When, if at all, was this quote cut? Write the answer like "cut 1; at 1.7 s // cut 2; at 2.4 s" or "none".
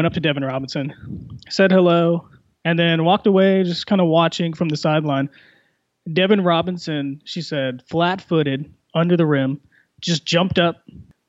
none